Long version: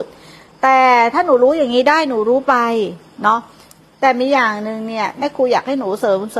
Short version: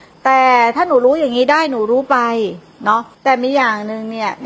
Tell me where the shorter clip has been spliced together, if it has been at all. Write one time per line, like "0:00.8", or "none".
0:03.1